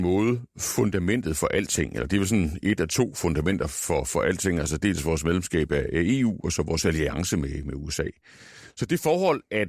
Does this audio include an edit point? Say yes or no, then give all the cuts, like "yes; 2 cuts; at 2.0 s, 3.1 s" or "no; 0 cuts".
no; 0 cuts